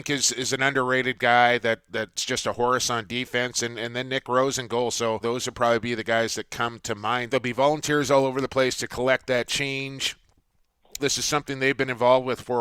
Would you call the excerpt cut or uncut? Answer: cut